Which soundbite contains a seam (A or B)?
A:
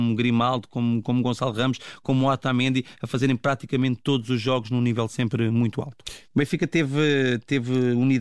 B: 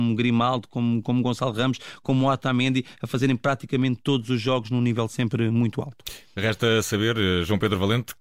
A